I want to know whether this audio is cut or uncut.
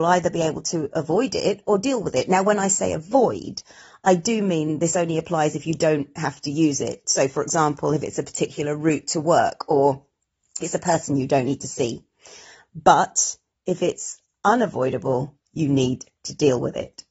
cut